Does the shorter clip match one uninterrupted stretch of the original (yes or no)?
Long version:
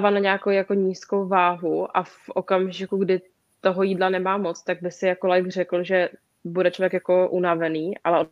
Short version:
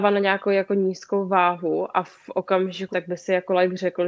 no